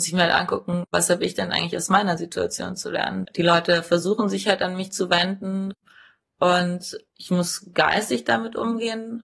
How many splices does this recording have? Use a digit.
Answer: 1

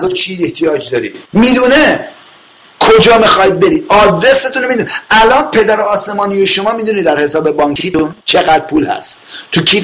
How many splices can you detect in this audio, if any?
2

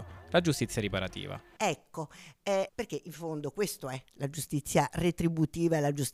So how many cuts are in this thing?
2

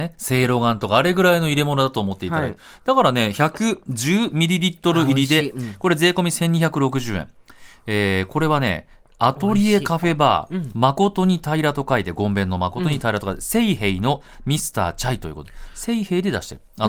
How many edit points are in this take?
0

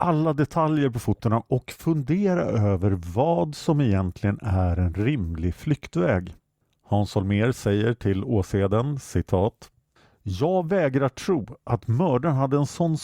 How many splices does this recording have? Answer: 0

